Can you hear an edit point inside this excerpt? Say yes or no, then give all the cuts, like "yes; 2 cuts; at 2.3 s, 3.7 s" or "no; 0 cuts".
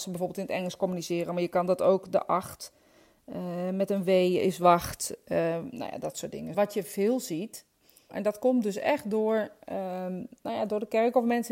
yes; 2 cuts; at 6.5 s, 8.1 s